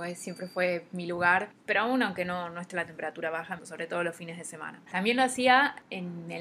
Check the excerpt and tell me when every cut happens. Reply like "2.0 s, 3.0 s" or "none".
1.5 s, 3.6 s, 4.9 s